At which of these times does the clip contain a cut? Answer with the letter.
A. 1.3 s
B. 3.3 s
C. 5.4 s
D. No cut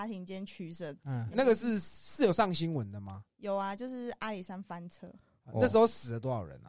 A